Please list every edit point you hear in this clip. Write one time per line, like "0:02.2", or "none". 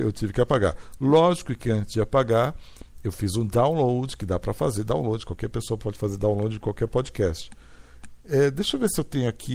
0:08.2